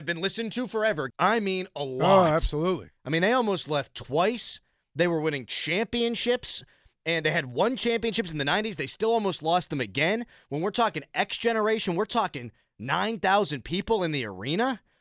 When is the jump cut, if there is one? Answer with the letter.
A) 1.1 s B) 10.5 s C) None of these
A